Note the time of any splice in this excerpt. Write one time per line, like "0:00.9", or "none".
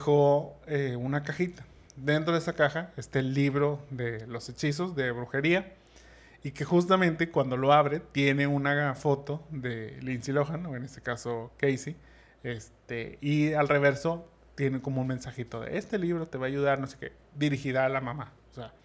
none